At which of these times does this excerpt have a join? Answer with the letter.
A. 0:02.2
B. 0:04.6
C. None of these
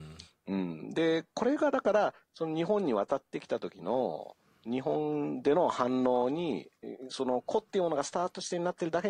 C